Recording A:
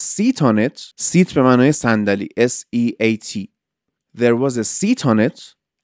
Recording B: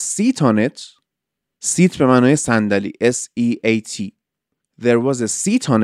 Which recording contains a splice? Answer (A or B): A